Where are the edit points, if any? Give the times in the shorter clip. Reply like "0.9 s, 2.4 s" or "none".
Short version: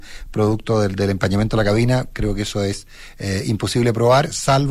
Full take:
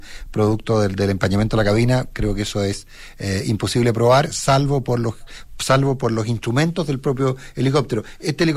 none